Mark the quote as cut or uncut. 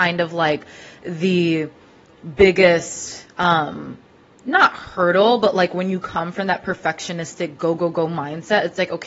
uncut